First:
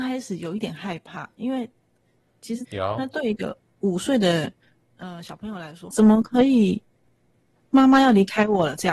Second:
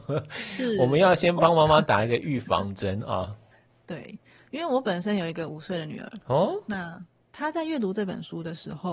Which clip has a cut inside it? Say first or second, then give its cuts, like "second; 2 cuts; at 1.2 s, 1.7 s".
first; 2 cuts; at 2.6 s, 5.9 s